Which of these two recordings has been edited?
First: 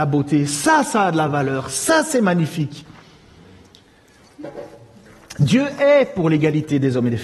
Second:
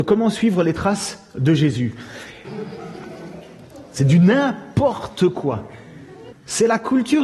second; 2 cuts; at 2.4 s, 6.3 s

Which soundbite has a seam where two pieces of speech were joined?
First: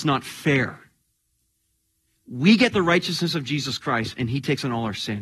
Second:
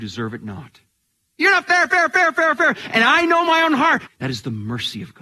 second; 2 cuts; at 1.4 s, 4.1 s

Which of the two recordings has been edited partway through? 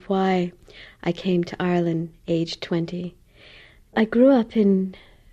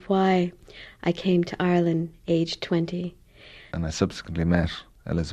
second; 1 cut; at 3.7 s

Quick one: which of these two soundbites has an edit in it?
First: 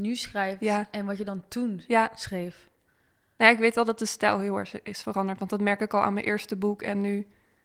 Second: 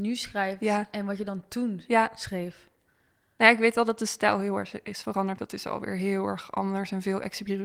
second; 1 cut; at 5.4 s

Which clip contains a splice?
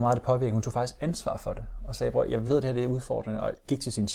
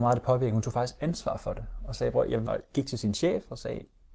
second; 1 cut; at 2.5 s

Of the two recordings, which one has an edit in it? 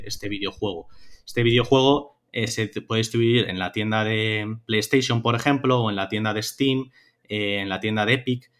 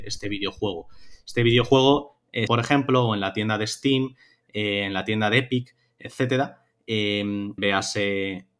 second; 2 cuts; at 2.5 s, 7.6 s

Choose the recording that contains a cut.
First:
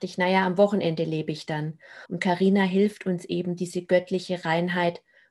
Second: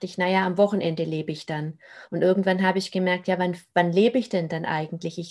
first; 1 cut; at 2.1 s

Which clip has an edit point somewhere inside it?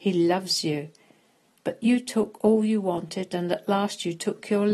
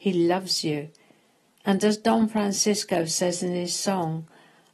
first; 1 cut; at 1.6 s

